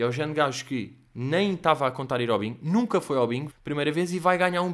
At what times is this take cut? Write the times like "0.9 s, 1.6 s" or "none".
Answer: 3.5 s